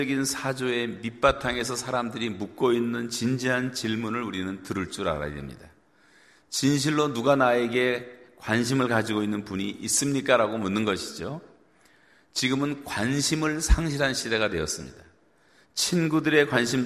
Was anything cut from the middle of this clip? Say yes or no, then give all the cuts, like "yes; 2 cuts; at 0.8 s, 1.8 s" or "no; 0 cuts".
no; 0 cuts